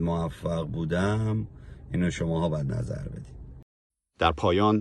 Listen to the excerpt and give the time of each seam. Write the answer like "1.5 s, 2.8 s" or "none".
none